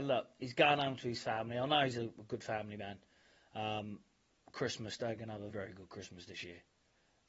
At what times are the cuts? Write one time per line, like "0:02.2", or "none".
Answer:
0:05.5